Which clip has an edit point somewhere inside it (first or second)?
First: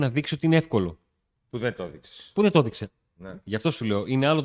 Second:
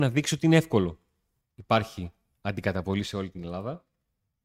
second